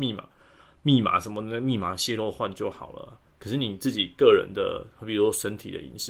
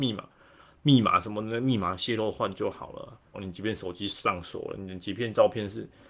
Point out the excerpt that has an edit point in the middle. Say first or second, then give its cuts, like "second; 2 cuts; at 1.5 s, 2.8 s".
second; 1 cut; at 3.3 s